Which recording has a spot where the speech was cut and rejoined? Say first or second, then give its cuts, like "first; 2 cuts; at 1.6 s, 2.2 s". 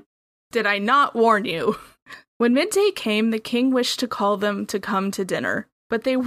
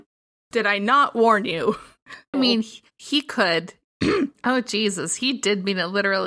second; 2 cuts; at 2.3 s, 3.9 s